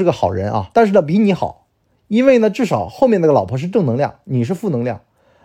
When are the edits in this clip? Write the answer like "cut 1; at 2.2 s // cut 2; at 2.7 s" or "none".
none